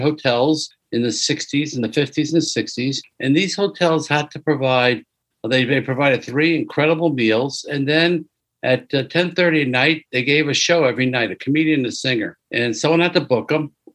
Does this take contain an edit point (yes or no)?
no